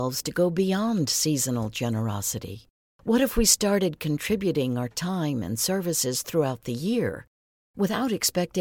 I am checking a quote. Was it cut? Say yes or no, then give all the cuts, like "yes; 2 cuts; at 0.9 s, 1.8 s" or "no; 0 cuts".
no; 0 cuts